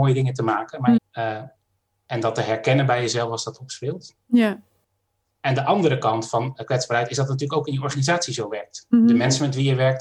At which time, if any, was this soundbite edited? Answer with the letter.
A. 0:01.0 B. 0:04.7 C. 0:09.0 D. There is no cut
A